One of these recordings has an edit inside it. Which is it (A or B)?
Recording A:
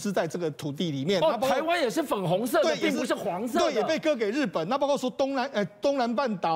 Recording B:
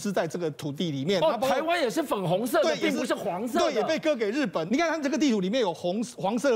B